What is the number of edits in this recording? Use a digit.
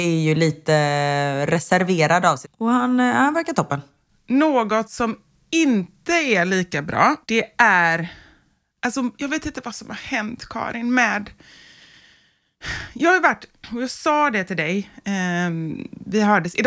2